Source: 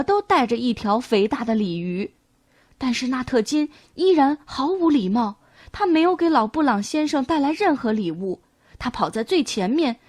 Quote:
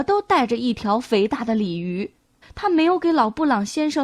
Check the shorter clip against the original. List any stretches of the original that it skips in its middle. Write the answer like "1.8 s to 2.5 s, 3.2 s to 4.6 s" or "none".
2.4 s to 5.6 s